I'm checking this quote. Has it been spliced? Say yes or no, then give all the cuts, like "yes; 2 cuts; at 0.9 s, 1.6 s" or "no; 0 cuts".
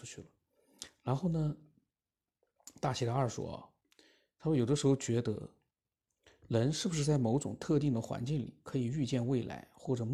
no; 0 cuts